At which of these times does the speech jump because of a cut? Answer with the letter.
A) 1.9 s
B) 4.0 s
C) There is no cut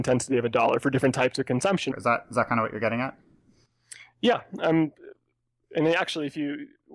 A